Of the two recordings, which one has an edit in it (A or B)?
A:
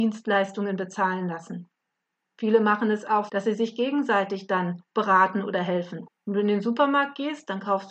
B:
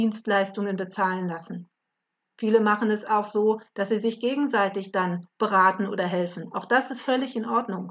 A